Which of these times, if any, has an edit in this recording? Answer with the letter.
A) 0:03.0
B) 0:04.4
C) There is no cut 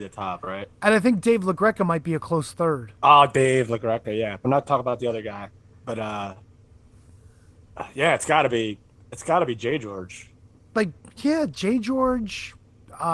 A